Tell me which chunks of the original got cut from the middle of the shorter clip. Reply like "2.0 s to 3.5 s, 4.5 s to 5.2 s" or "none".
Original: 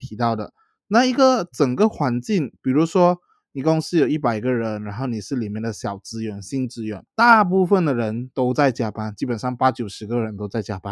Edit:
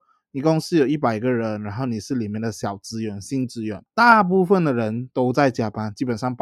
none